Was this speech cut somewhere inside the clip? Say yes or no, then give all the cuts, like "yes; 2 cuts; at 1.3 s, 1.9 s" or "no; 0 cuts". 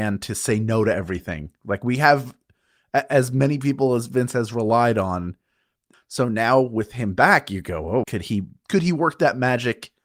yes; 2 cuts; at 5.9 s, 8.0 s